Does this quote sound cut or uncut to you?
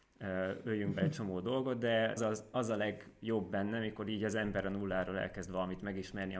cut